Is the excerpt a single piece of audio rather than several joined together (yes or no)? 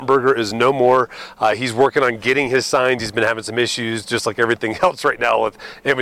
yes